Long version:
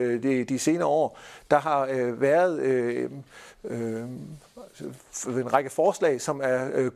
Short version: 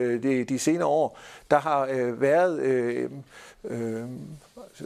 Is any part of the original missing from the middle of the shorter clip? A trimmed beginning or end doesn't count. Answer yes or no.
no